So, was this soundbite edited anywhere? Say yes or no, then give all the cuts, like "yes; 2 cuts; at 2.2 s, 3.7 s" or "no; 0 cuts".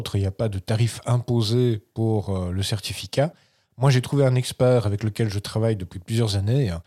no; 0 cuts